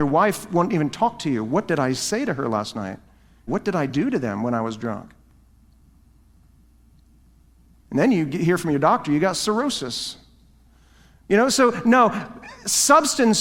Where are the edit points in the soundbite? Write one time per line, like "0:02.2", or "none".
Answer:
0:03.5